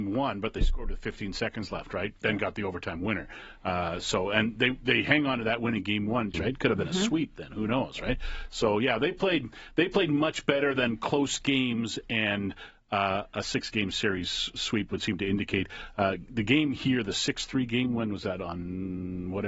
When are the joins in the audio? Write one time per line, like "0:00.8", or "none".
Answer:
0:06.3